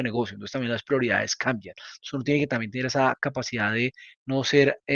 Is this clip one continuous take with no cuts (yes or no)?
yes